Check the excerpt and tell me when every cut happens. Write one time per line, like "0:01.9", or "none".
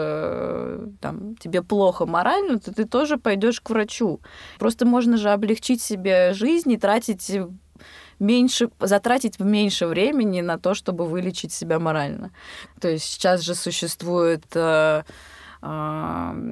0:04.6
0:12.7